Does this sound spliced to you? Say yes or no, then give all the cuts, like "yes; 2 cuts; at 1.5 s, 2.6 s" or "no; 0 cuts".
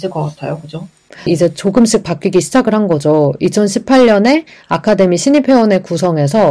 yes; 1 cut; at 1.3 s